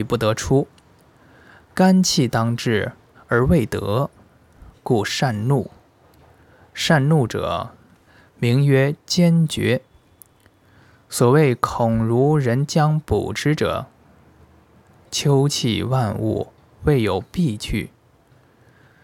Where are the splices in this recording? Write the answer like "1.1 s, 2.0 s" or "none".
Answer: none